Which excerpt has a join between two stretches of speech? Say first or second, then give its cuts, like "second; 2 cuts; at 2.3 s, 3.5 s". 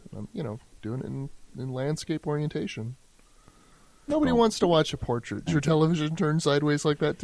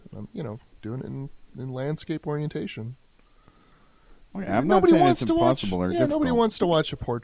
first; 2 cuts; at 4.1 s, 5.5 s